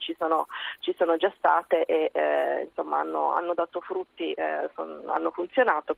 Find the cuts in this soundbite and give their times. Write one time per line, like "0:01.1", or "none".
none